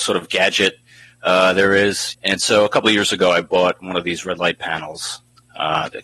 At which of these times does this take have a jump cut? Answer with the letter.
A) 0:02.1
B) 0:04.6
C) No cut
A